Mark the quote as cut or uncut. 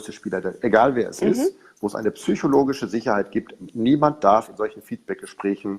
uncut